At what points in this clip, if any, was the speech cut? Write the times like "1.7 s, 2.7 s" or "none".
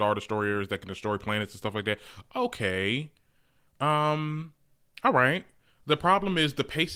none

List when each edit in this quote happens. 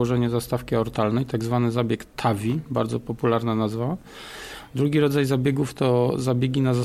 none

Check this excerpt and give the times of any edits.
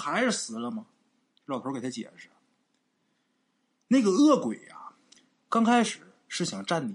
none

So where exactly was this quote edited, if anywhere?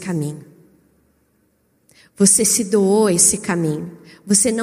none

